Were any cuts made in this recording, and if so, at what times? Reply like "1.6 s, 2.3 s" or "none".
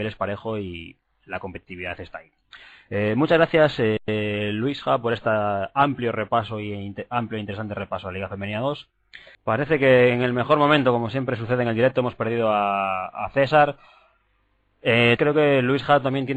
9.3 s, 15.2 s